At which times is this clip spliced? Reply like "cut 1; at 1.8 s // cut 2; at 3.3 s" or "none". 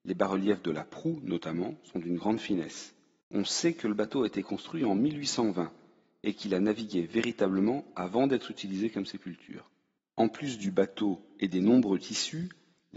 cut 1; at 3.2 s // cut 2; at 10.0 s

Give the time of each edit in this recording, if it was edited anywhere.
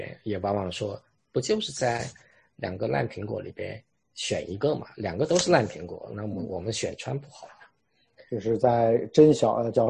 none

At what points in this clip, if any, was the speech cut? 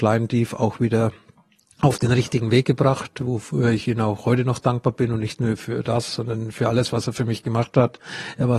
none

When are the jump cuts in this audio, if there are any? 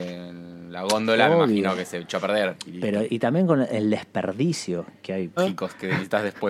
cut 1; at 3.1 s // cut 2; at 5.4 s

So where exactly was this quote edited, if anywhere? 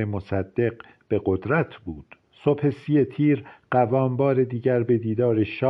cut 1; at 2.3 s

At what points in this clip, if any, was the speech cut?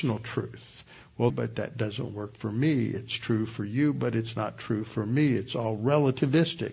cut 1; at 1.3 s

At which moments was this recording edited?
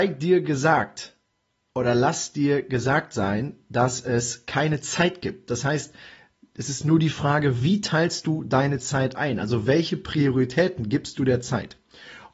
none

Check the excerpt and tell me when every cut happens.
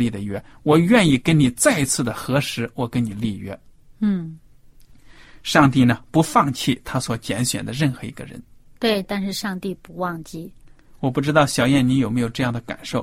cut 1; at 9.0 s

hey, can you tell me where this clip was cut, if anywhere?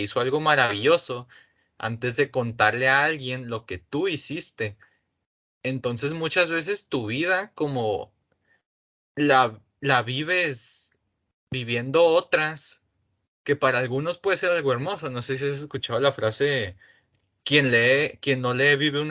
none

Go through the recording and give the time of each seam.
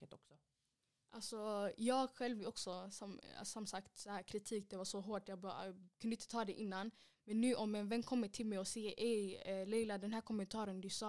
none

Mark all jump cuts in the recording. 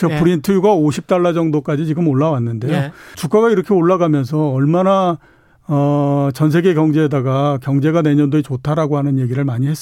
cut 1; at 3.1 s

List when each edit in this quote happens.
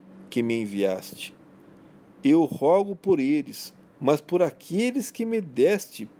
cut 1; at 3.9 s

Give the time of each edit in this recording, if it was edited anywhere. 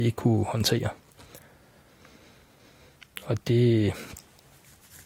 none

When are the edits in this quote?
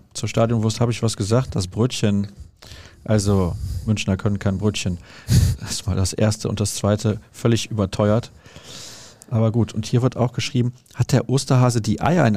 none

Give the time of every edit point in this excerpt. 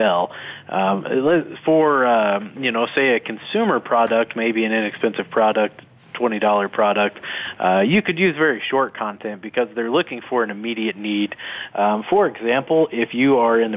cut 1; at 11.7 s

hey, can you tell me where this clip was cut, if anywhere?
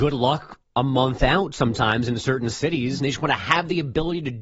cut 1; at 3.0 s

